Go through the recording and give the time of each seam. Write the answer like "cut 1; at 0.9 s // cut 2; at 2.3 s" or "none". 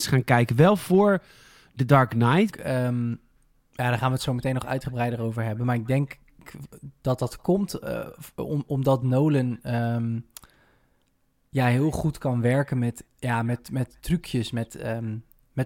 cut 1; at 2.5 s

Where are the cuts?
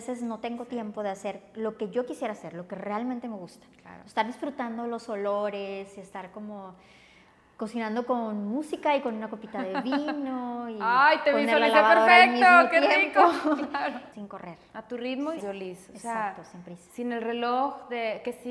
cut 1; at 14.1 s // cut 2; at 15.4 s

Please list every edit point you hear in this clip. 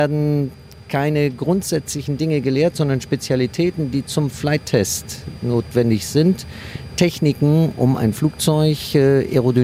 none

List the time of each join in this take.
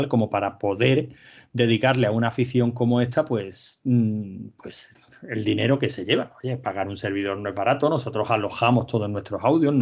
none

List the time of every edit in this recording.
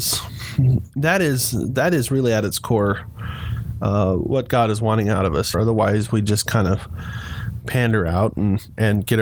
cut 1; at 5.5 s

